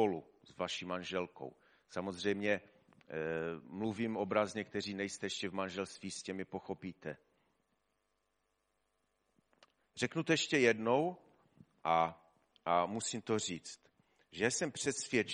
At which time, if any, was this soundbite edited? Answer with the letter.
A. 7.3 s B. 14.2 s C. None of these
C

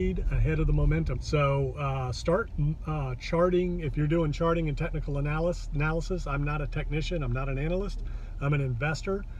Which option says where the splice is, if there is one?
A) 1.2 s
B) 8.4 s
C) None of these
A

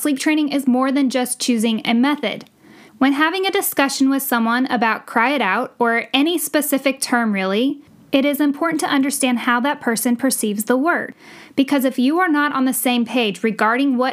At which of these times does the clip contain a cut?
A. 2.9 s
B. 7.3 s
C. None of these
A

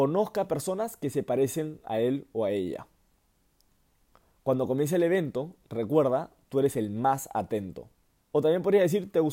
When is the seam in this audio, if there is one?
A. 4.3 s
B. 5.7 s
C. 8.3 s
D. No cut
C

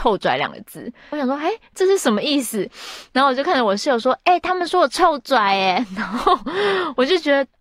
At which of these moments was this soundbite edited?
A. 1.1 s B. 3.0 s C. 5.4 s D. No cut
A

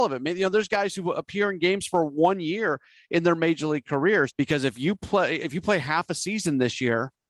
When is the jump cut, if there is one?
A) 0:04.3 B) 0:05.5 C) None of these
A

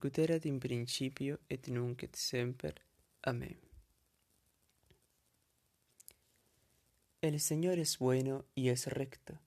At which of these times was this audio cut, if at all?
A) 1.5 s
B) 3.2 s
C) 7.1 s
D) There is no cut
B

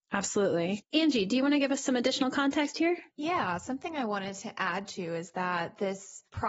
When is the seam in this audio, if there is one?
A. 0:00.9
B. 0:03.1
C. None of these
B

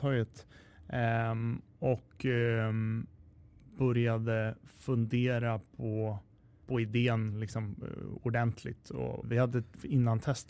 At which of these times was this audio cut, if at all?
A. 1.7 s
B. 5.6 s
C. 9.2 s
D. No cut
C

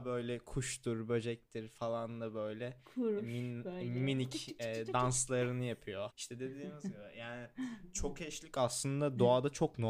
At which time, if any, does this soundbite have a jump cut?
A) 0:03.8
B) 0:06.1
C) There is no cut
B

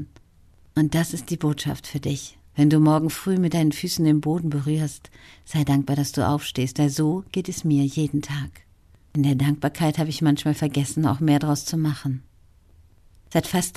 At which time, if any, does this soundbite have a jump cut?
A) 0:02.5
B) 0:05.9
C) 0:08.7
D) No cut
A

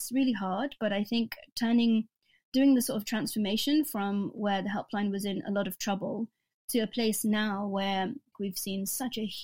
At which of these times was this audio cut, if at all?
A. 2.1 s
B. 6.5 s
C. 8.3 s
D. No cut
C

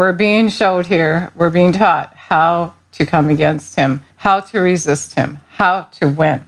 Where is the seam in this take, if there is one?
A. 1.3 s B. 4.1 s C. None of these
B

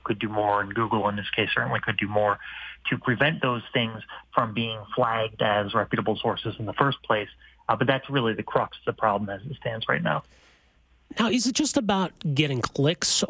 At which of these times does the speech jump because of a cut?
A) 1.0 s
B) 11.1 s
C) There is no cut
C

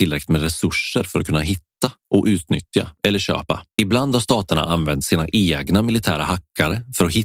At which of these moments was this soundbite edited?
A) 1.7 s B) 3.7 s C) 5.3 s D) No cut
B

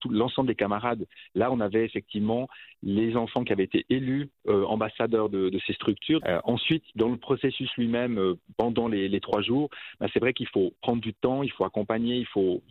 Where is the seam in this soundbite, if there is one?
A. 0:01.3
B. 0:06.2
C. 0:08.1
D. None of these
B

